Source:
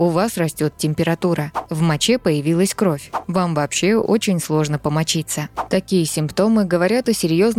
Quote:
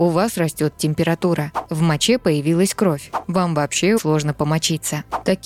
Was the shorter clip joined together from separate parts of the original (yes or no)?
yes